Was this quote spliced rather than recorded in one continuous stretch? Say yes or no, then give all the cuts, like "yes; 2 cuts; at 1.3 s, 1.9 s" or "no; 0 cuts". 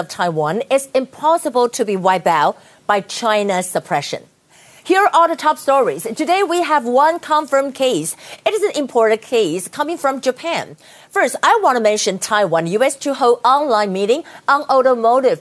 no; 0 cuts